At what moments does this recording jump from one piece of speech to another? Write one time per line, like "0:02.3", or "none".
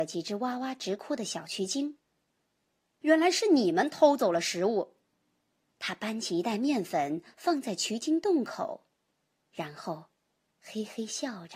0:03.0
0:05.7